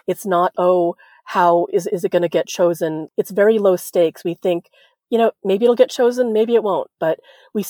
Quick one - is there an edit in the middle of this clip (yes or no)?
no